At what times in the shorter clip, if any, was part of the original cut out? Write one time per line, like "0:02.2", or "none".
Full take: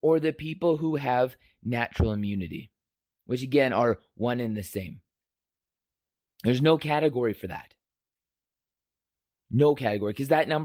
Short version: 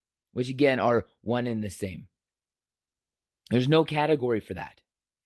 none